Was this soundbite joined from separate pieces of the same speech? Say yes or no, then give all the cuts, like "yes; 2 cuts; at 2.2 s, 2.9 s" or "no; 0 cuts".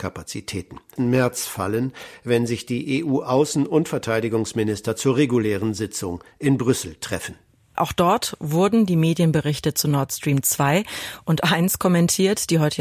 yes; 2 cuts; at 1.0 s, 7.8 s